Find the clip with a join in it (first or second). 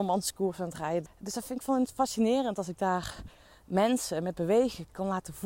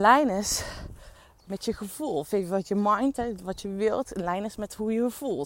first